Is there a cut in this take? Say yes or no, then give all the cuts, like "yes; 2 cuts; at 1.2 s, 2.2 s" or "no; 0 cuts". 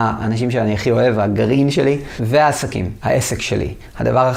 no; 0 cuts